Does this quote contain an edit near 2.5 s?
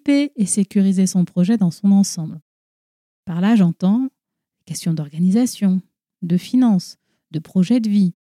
no; 0 cuts

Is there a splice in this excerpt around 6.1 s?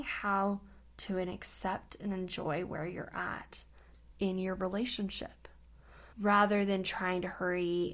yes; 1 cut; at 6.1 s

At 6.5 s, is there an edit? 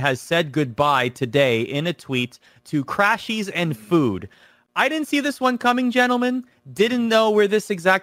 no; 0 cuts

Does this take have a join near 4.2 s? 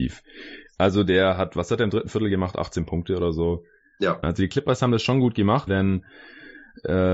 yes; 2 cuts; at 4.2 s, 5.7 s

